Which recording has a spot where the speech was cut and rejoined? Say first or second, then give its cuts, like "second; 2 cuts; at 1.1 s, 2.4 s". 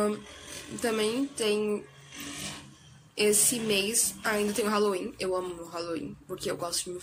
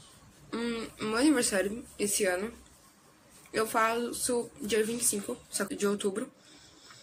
second; 1 cut; at 5.7 s